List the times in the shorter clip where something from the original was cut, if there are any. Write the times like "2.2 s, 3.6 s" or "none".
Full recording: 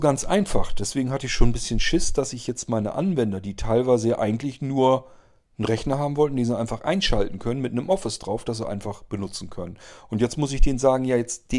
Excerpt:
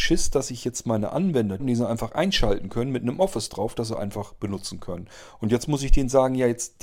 1.6 s

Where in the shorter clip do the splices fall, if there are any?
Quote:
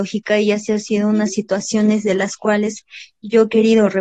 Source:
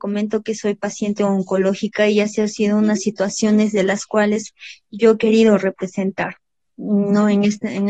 none

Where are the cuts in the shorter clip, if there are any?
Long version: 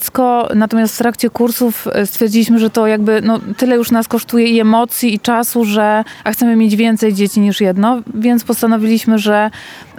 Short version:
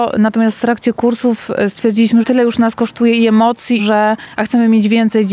2.2 s, 3.8 s

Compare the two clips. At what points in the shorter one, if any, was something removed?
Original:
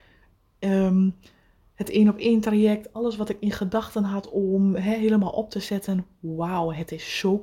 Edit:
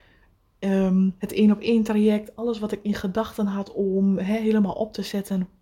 1.2 s

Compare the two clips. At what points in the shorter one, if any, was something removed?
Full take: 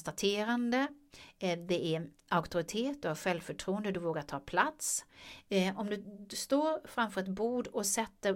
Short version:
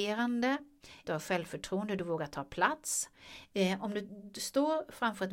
1.0 s

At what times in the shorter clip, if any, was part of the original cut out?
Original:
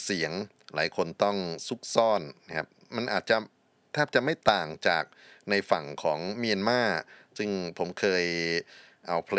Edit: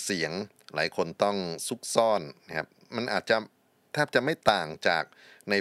none

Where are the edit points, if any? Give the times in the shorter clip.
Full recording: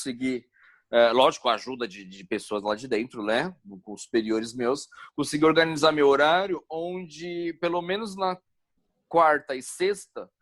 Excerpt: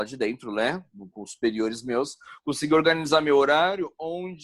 none

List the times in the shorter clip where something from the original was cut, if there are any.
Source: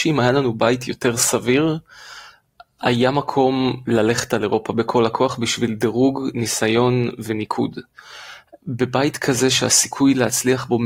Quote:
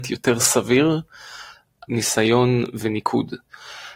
1.9 s

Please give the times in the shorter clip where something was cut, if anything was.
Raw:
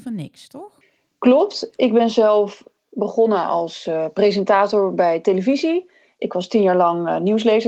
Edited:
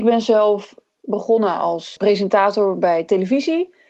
2.0 s

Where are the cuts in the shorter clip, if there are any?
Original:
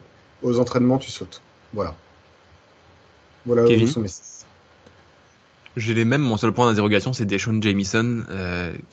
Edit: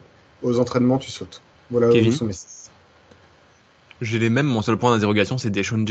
1.5 s

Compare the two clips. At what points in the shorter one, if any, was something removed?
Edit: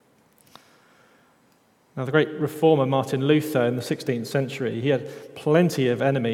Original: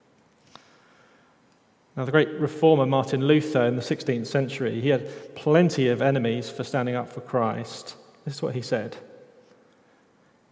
none

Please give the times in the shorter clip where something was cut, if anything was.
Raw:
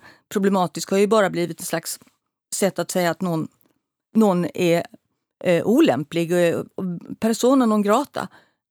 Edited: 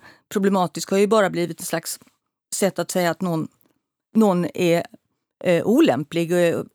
none

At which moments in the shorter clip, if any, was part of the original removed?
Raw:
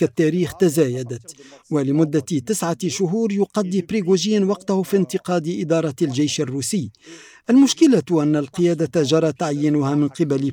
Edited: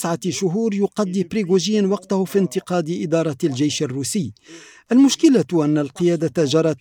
none

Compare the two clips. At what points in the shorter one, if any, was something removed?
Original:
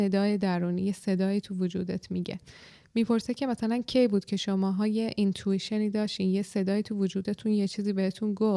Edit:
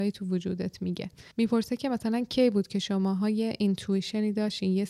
1.3 s

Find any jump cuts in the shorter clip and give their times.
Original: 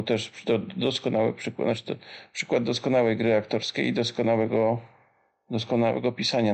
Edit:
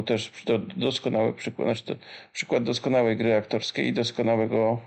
none

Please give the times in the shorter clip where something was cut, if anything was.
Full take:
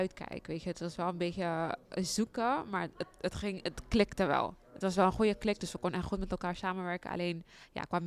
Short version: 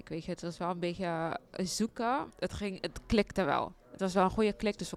2.3 s

